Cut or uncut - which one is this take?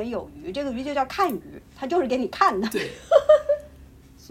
uncut